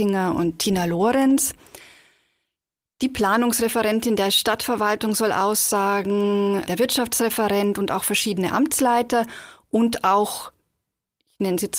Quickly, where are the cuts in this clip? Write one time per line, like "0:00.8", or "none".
0:06.7